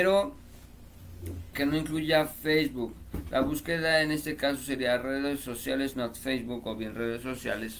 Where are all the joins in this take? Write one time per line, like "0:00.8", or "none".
0:01.5